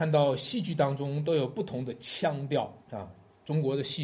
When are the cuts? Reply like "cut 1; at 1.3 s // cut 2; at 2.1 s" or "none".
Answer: cut 1; at 2.8 s